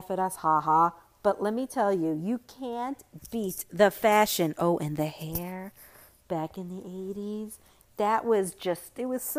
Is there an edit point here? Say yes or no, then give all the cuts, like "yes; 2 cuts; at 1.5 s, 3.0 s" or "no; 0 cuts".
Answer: no; 0 cuts